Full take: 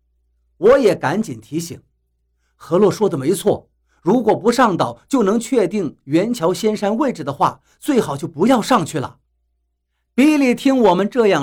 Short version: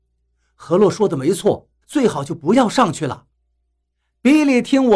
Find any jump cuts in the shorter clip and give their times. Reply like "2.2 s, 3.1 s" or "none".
1.8 s